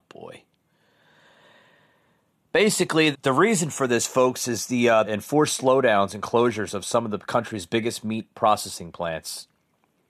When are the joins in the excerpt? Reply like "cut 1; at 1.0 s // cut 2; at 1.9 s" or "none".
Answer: cut 1; at 3.1 s // cut 2; at 5.0 s